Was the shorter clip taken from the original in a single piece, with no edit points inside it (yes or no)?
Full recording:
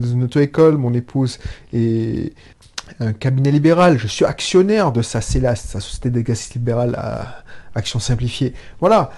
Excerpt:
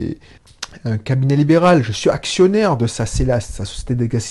yes